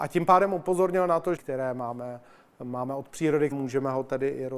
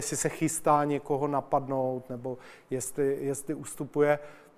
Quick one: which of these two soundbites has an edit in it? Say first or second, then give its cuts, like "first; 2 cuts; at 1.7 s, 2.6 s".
first; 2 cuts; at 1.4 s, 3.5 s